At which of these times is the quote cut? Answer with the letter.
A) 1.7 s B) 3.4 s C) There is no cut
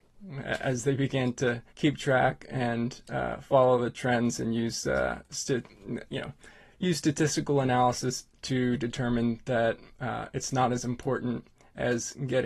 A